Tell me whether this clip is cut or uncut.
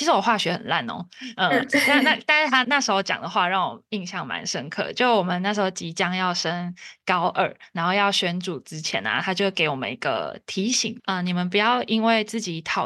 cut